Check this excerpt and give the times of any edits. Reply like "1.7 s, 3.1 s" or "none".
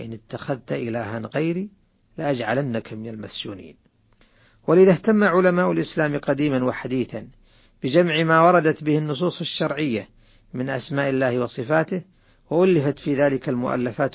none